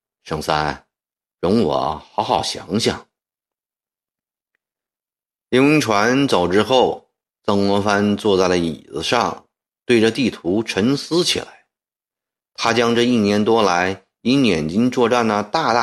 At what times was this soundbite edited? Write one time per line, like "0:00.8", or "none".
0:01.3